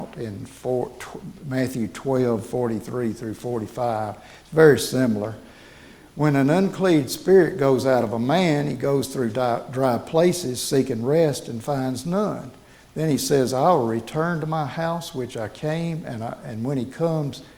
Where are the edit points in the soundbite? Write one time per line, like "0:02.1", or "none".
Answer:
none